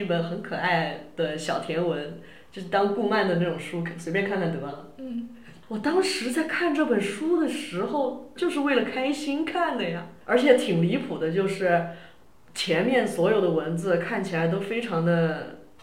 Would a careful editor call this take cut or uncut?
cut